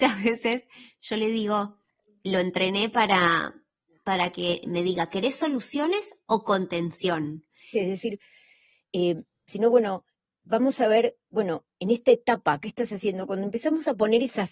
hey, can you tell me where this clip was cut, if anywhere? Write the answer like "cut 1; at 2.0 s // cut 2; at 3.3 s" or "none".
cut 1; at 7.7 s // cut 2; at 9.5 s